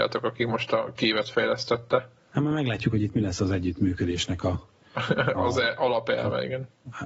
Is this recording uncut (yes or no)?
no